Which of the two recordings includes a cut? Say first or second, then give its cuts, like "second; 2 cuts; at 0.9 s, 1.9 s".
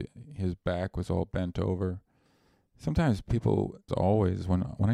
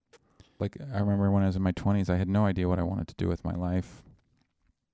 first; 1 cut; at 3.9 s